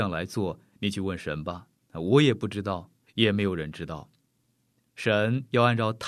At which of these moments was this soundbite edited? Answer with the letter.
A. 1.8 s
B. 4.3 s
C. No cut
C